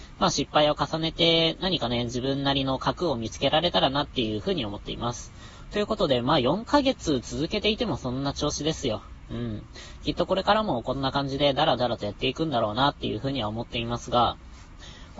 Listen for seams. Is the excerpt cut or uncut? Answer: uncut